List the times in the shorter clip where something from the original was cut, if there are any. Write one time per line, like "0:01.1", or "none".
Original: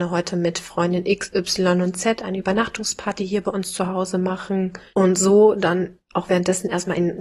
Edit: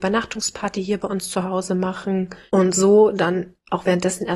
none